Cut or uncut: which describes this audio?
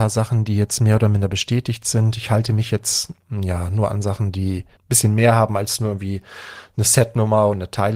cut